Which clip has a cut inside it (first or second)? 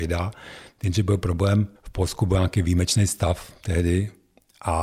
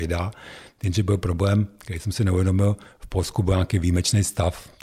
first